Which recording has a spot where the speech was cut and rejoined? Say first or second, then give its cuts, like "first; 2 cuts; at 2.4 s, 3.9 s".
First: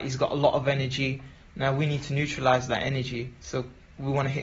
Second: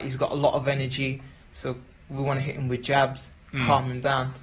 second; 1 cut; at 1.5 s